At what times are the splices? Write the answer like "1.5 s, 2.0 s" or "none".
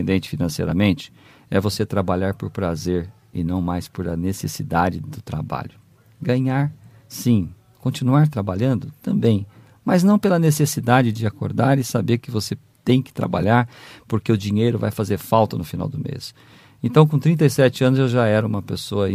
none